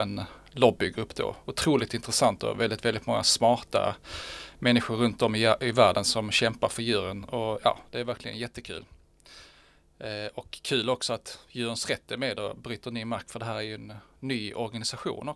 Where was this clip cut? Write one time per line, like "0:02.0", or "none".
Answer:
none